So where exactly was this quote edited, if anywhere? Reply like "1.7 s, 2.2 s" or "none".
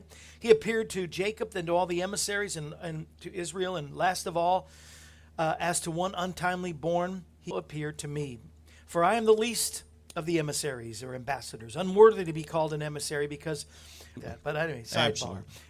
7.5 s, 14.2 s